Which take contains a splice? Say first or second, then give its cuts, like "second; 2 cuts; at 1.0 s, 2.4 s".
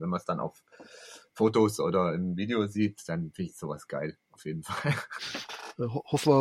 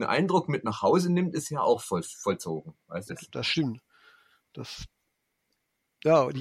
second; 1 cut; at 3.1 s